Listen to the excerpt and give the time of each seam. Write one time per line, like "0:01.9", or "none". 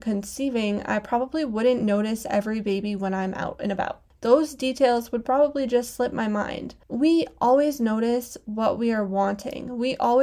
0:06.8